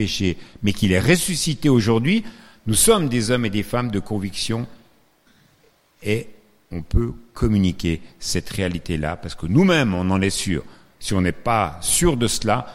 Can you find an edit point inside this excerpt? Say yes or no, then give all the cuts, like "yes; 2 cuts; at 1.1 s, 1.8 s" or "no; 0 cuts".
no; 0 cuts